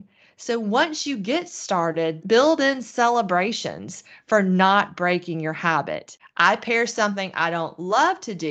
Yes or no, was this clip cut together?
yes